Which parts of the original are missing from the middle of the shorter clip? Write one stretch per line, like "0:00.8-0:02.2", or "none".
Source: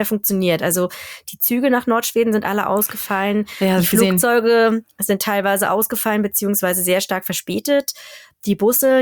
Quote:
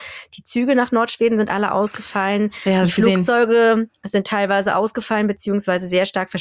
none